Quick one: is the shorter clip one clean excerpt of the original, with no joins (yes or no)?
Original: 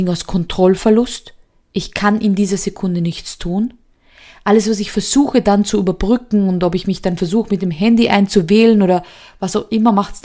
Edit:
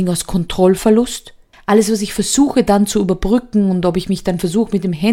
no